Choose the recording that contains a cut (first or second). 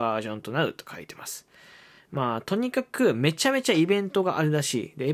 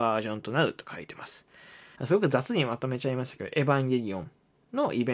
second